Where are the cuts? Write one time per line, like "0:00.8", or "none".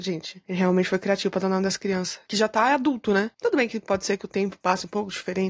none